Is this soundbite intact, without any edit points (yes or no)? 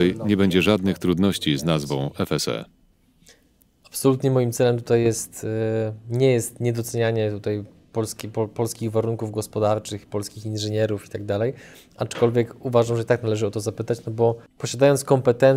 yes